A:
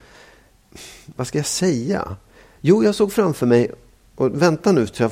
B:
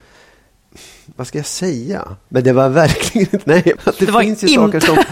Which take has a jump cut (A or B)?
B